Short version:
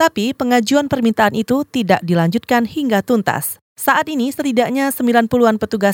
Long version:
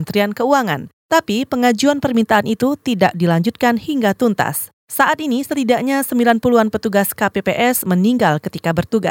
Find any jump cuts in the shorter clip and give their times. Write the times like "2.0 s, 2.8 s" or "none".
none